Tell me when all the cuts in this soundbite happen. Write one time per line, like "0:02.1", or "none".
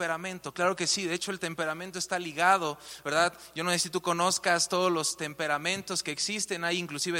none

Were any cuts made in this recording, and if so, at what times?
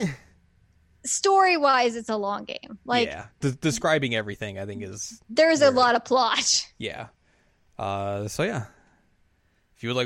none

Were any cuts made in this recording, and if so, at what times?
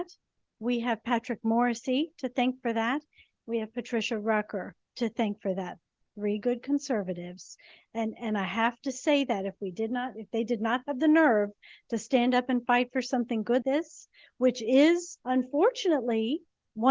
0:13.6
0:15.2

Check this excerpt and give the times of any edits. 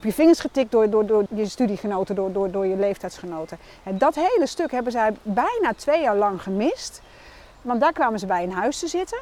0:01.3
0:07.5

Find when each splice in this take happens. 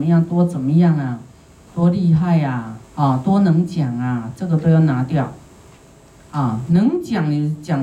0:01.7
0:02.8

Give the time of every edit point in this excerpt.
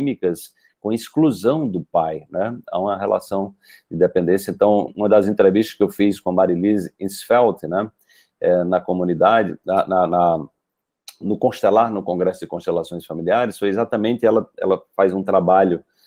0:04.9

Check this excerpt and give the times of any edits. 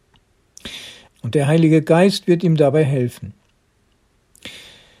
0:01.1

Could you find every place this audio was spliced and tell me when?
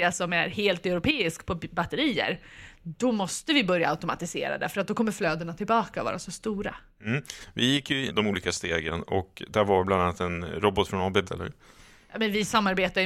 0:08.1
0:11.2

